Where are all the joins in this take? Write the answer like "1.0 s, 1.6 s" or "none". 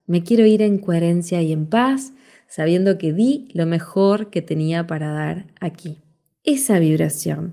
none